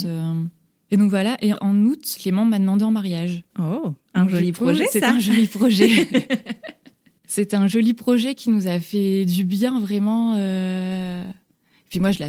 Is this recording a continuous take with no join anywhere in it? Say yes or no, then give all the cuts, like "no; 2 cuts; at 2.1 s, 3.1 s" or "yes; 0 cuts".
yes; 0 cuts